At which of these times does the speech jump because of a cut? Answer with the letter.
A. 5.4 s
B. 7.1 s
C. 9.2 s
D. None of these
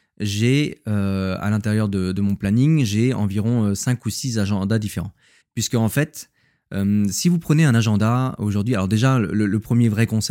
A